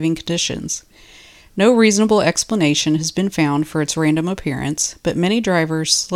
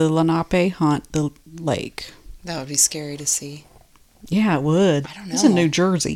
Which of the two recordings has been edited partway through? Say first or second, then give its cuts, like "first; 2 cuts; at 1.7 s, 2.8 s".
second; 1 cut; at 5.0 s